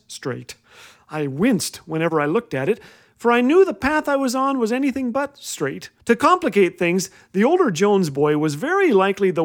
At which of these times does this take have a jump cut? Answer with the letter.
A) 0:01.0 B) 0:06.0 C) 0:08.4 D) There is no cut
B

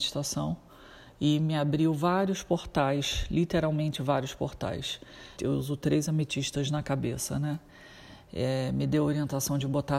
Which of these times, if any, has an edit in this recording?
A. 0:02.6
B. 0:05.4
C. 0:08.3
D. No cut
B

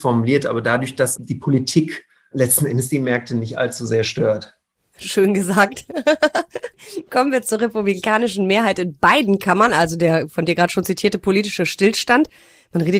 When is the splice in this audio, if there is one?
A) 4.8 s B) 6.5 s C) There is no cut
C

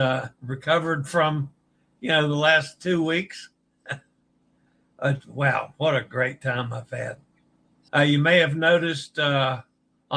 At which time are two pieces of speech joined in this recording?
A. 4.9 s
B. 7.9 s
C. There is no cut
B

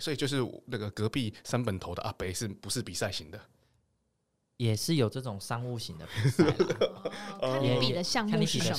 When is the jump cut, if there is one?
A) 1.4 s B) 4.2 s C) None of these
C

